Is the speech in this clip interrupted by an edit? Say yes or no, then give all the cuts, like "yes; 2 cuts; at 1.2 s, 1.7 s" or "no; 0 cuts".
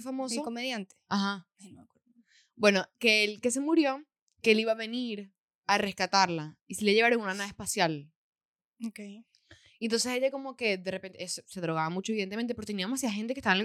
no; 0 cuts